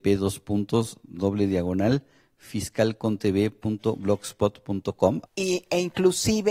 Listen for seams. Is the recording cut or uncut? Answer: cut